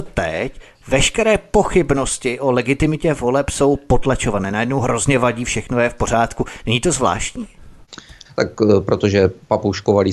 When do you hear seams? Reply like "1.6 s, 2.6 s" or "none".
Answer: 8.2 s